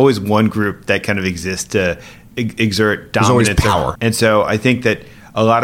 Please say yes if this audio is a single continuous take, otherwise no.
no